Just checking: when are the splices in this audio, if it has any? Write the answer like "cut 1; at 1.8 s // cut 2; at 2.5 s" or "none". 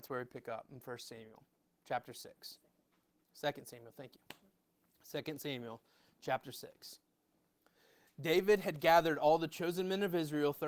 none